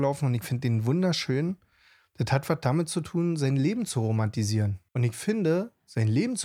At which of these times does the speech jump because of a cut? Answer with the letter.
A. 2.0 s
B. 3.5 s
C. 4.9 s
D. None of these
C